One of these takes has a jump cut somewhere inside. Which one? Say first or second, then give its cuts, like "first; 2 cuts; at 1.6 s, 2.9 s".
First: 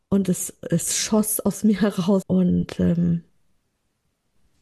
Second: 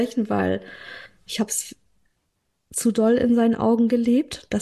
first; 1 cut; at 2.2 s